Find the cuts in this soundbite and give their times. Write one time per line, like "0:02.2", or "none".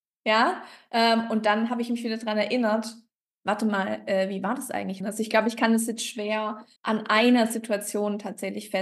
0:05.0
0:06.8

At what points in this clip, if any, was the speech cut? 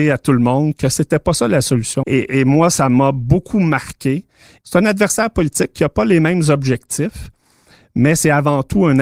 0:02.0
0:04.6

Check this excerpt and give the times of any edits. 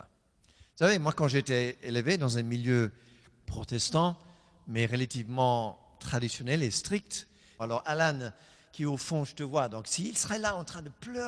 0:03.4
0:07.6

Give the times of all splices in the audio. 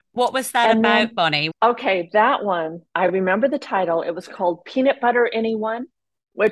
0:01.5

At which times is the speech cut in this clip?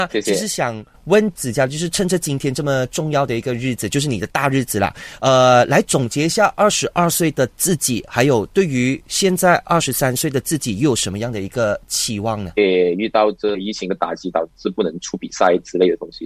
0:12.6

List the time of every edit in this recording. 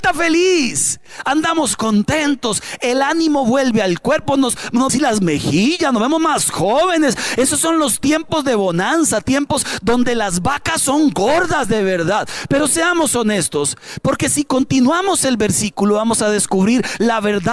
0:04.9

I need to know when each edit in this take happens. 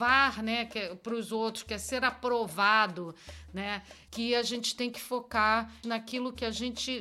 0:04.1
0:05.8

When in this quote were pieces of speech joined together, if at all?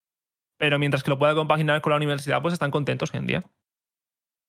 none

